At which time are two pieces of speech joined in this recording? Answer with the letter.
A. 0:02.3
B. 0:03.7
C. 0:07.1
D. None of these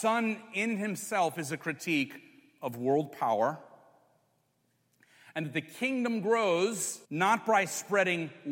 C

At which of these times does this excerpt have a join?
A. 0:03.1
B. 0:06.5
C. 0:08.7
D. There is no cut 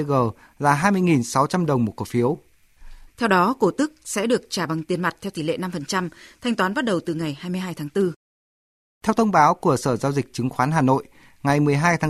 A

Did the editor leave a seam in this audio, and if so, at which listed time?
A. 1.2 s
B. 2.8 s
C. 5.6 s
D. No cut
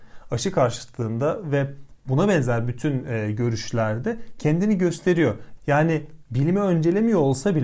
C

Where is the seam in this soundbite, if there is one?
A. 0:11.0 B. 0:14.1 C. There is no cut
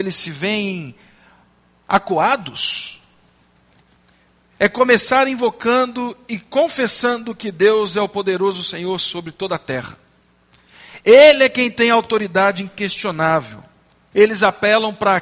B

